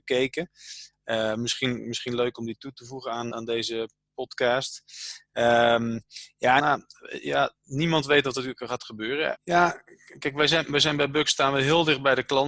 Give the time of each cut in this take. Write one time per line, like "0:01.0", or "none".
0:03.3
0:06.6
0:09.3